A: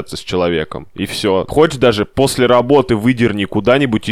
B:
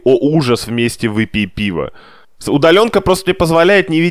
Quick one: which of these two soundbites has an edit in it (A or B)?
A